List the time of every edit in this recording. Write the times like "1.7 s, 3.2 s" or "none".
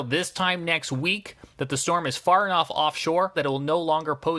3.3 s